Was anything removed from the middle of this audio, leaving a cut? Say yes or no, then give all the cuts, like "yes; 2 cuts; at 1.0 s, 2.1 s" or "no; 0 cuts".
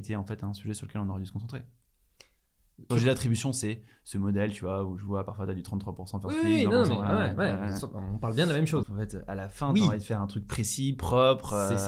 yes; 2 cuts; at 2.9 s, 8.8 s